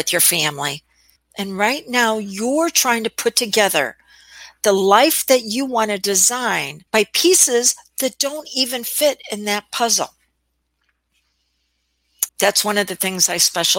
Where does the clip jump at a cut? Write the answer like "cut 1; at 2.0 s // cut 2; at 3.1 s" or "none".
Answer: cut 1; at 1.2 s // cut 2; at 6.9 s // cut 3; at 12.3 s